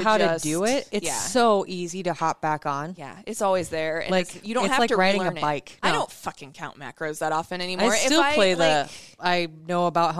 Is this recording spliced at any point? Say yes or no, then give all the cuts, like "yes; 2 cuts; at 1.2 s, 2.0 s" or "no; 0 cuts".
yes; 1 cut; at 5.8 s